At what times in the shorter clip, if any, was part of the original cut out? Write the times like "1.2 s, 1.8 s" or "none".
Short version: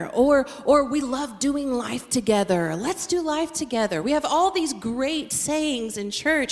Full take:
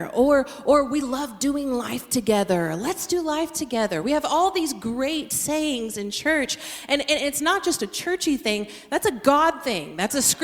none